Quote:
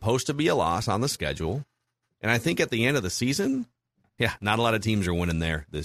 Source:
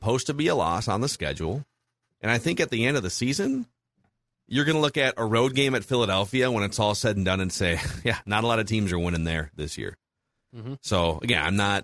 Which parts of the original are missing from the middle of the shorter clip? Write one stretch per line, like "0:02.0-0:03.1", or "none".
0:04.2-0:08.0

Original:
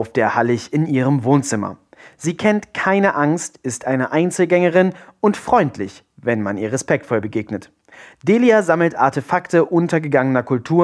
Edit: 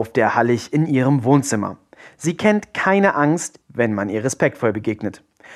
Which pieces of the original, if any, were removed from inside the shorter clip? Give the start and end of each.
0:03.6-0:06.1

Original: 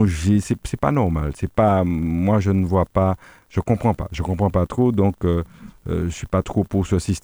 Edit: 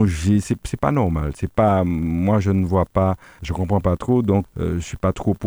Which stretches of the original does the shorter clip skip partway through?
0:03.4-0:04.1
0:05.1-0:05.8

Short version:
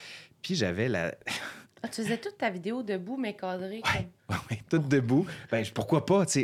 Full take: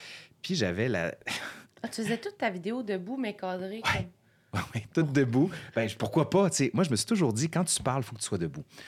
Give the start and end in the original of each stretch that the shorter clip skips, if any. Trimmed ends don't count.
0:04.2-0:04.4

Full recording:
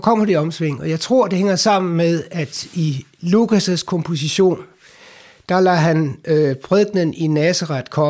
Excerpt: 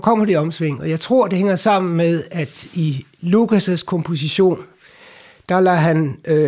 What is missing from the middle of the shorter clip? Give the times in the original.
none

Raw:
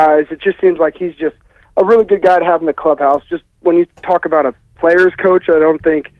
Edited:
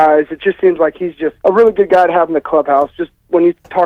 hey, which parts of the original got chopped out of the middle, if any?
0:01.4-0:01.7

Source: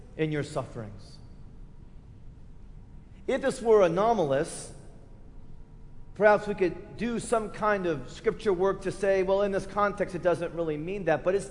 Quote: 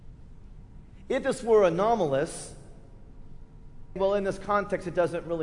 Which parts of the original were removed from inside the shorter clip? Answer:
0:06.1-0:09.2

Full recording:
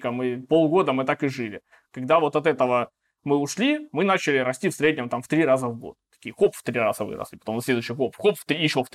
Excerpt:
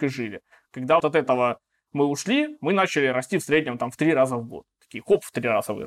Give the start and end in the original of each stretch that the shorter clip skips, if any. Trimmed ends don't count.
0:02.2-0:02.3

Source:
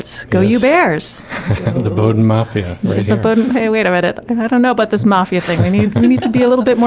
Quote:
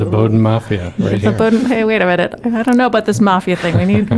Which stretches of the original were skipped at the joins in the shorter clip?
none

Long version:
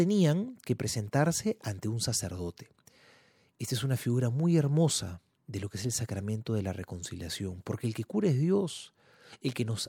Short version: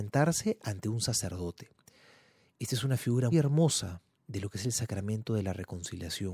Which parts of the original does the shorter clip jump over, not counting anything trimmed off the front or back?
0:04.3-0:04.5

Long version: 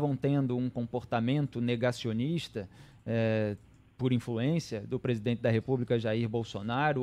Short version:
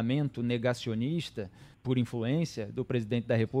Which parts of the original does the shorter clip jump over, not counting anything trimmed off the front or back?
0:02.9-0:03.9

